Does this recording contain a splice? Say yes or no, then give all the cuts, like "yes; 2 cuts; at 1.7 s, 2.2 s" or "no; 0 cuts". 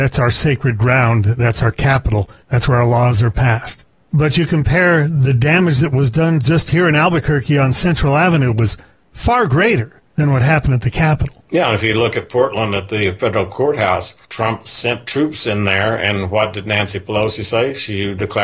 yes; 1 cut; at 14.2 s